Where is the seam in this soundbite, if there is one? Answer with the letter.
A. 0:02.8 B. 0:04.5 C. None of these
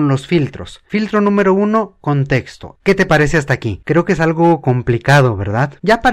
A